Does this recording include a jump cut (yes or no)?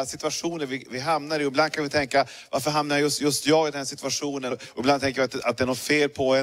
yes